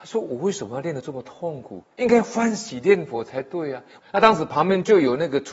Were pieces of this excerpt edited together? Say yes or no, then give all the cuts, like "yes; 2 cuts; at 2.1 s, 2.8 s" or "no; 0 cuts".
yes; 2 cuts; at 1.8 s, 4.0 s